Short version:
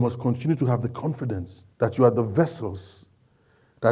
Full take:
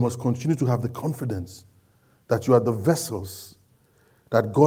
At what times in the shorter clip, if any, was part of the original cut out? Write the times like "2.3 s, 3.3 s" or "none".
1.7 s